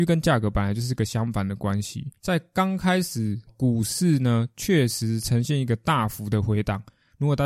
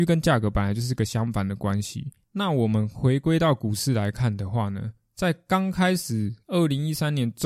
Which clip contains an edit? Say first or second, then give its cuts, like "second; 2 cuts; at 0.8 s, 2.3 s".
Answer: first; 2 cuts; at 2.2 s, 3.5 s